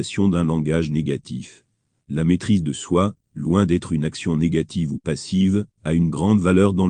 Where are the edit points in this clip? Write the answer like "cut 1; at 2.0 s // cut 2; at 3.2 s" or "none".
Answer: none